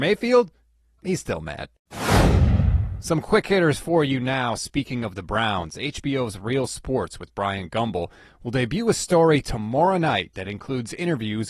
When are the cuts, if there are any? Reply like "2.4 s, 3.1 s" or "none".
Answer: 1.0 s